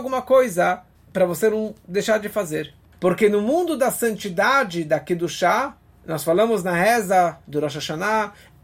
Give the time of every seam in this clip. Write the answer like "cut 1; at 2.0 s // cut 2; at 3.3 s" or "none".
cut 1; at 2.9 s